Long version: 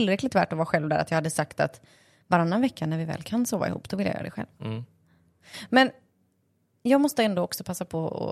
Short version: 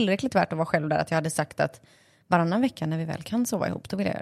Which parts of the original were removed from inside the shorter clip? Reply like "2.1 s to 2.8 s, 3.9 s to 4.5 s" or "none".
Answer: none